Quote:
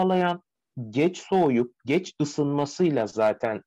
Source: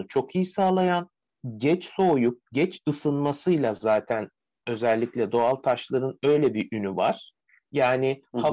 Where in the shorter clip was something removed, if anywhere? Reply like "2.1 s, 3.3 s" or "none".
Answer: none